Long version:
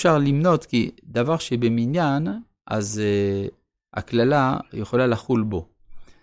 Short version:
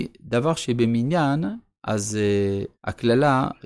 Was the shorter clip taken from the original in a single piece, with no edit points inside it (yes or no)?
no